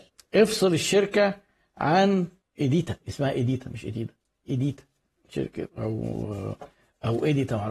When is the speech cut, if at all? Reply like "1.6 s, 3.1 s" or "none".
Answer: 5.7 s